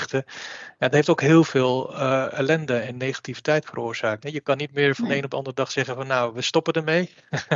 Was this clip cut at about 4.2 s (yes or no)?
yes